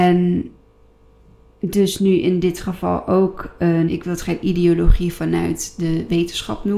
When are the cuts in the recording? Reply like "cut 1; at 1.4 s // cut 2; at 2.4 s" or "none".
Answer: cut 1; at 3.9 s